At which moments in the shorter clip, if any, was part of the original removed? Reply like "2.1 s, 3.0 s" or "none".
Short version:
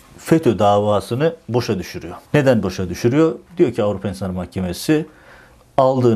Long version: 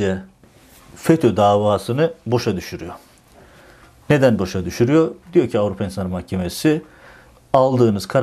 2.2 s